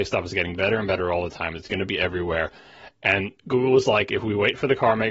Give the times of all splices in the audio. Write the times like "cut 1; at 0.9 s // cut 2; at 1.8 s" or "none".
none